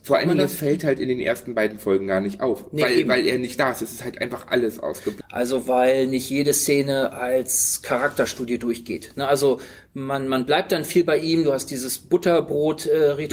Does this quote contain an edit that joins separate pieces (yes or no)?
yes